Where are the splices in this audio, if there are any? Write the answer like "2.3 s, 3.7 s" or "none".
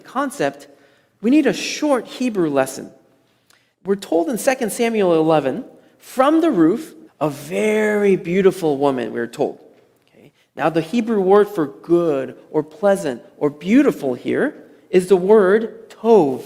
3.7 s, 7.1 s